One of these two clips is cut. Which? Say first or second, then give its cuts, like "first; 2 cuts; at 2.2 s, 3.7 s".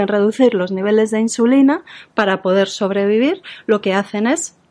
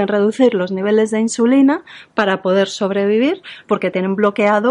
second; 1 cut; at 3.6 s